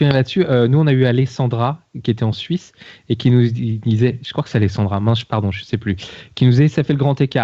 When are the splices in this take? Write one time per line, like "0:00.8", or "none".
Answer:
none

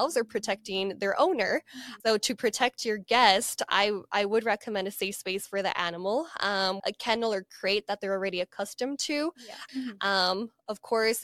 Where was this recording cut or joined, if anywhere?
0:02.0
0:06.8
0:09.7

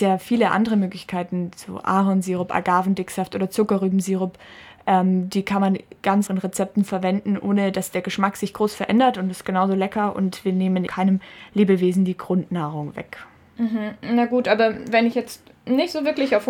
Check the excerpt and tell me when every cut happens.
0:06.3
0:10.9

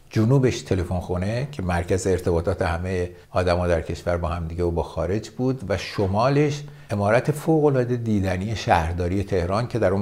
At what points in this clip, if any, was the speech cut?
0:03.2
0:06.9

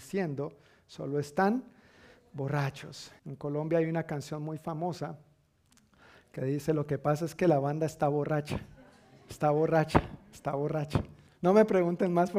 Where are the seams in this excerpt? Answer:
0:03.2
0:11.3

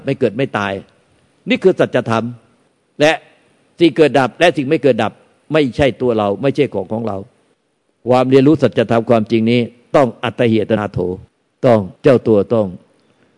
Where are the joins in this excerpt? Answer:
0:10.8
0:11.9

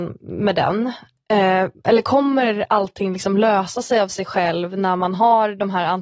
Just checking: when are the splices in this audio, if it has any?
0:01.7

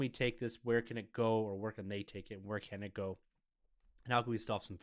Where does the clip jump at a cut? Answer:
none

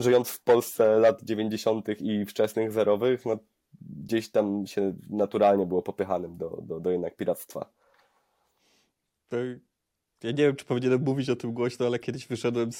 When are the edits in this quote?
none

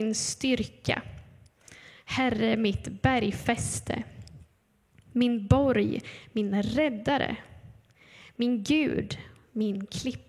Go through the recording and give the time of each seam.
none

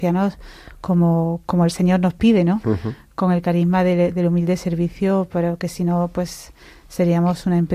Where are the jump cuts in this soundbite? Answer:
none

